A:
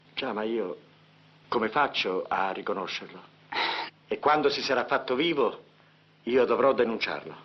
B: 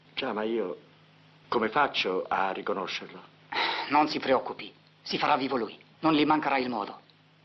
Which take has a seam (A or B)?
A